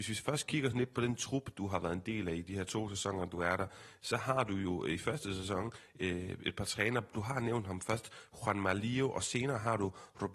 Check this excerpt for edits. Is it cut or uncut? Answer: uncut